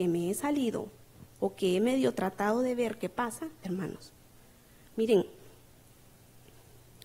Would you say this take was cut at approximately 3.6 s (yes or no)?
yes